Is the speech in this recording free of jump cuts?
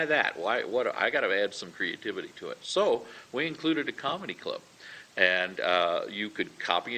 yes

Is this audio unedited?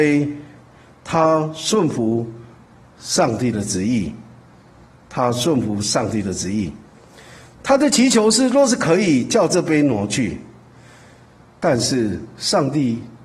yes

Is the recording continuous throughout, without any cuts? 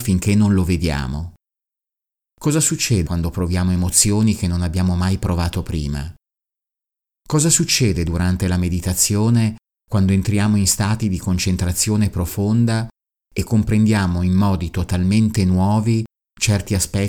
no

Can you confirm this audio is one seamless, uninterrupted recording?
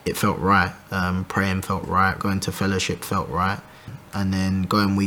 no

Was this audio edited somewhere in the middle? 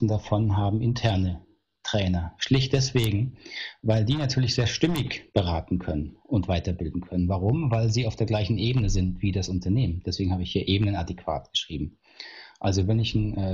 no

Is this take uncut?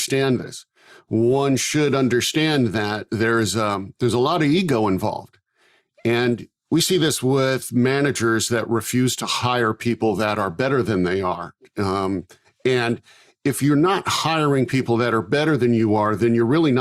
yes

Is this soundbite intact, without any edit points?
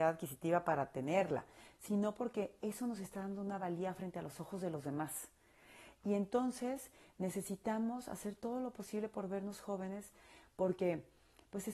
yes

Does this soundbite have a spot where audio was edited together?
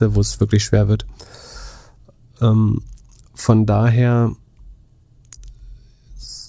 no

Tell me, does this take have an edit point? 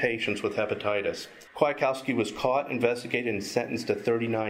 no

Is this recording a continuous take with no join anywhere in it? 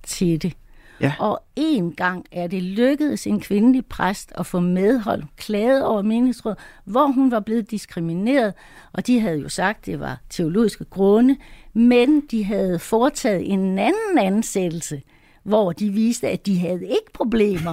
yes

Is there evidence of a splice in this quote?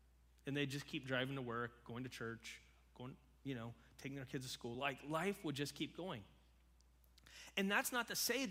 no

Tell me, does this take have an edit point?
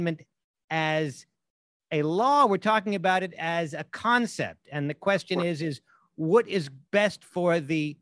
no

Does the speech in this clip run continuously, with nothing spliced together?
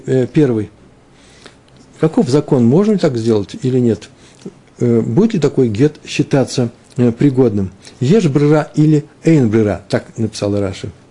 yes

